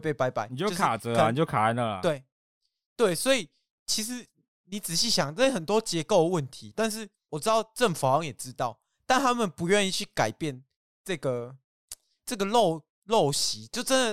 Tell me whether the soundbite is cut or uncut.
cut